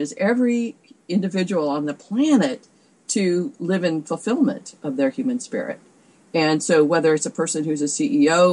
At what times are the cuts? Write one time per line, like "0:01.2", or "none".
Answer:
none